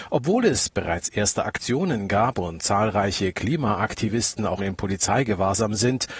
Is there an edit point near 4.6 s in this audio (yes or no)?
yes